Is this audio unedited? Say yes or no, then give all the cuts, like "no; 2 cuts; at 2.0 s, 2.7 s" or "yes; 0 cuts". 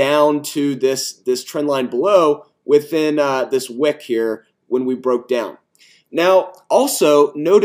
yes; 0 cuts